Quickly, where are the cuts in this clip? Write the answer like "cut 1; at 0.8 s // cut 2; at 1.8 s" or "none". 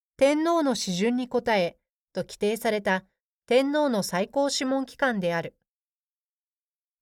cut 1; at 2.1 s